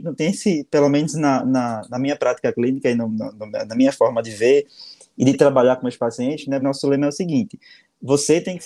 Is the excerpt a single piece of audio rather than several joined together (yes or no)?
no